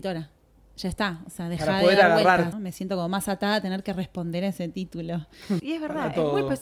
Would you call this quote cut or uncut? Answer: cut